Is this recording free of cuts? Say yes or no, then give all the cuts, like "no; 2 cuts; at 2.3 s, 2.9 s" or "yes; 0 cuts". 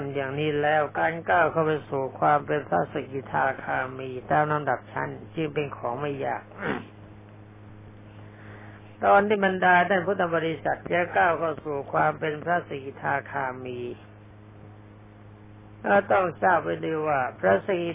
no; 1 cut; at 8.9 s